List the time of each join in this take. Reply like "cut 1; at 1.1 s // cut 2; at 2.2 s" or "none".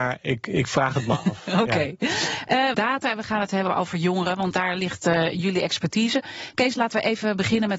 cut 1; at 2.7 s